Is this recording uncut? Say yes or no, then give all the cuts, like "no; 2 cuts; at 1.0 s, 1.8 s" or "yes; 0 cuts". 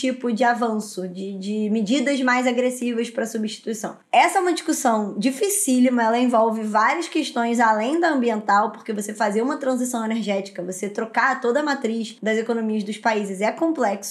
yes; 0 cuts